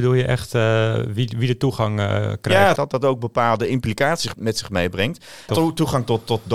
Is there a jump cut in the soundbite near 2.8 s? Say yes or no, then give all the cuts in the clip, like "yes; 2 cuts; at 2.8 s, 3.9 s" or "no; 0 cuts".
yes; 3 cuts; at 2.8 s, 4.3 s, 5.5 s